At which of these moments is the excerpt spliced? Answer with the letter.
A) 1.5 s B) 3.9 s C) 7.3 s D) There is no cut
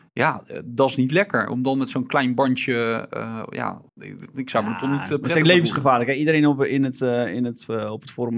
B